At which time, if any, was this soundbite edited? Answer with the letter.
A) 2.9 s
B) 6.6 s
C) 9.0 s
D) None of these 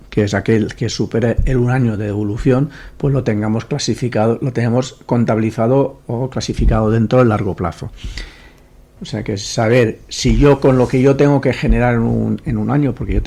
C